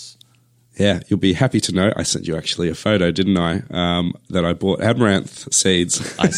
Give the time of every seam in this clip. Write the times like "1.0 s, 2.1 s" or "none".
none